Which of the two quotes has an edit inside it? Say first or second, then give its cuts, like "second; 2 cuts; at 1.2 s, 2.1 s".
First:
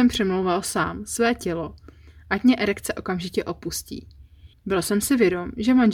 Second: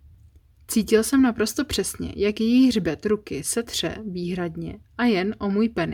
first; 1 cut; at 4.5 s